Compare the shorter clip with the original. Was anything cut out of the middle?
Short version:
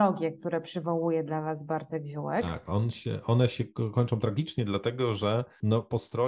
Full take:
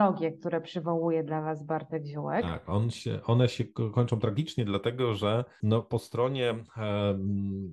no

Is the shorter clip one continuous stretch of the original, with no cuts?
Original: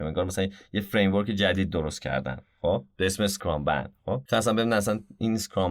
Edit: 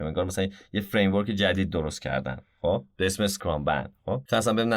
yes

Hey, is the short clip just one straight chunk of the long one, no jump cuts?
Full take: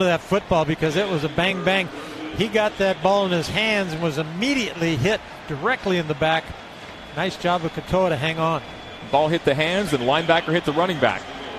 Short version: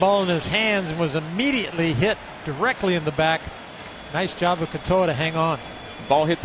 yes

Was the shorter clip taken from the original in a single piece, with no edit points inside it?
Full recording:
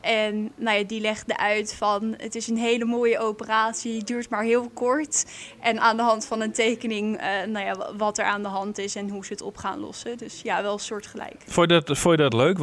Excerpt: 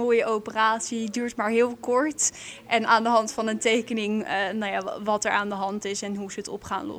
yes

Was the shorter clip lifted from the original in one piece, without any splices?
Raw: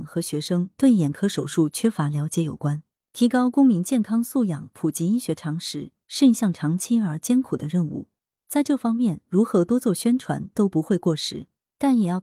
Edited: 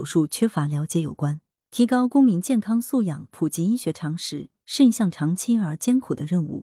yes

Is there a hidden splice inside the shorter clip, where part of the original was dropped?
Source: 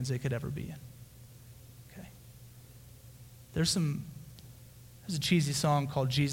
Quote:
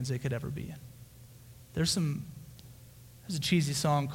yes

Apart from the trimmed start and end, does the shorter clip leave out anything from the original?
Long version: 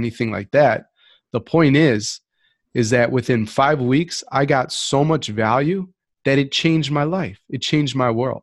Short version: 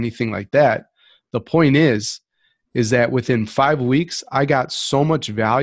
no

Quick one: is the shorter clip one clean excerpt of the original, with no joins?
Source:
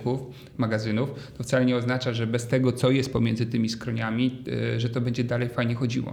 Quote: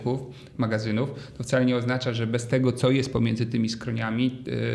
yes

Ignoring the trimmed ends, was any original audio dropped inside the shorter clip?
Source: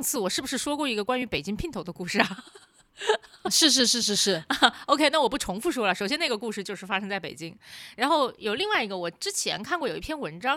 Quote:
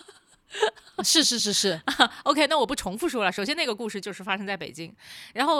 yes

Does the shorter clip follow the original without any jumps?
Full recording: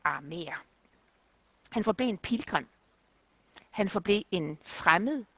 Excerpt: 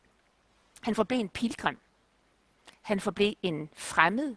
yes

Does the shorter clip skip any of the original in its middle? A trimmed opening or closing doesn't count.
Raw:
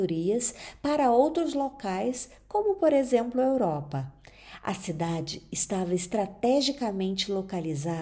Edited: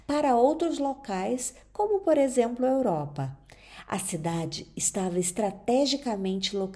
no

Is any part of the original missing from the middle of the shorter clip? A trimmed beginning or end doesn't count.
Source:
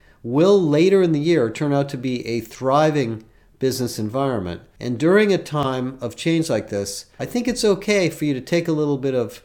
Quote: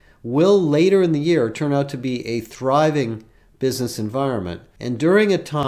no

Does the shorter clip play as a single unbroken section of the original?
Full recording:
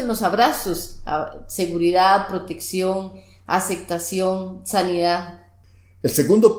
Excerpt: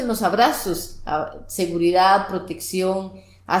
yes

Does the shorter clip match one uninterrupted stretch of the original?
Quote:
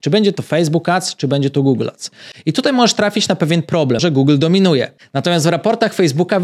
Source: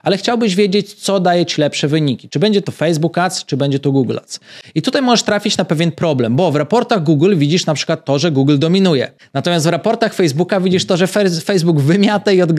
no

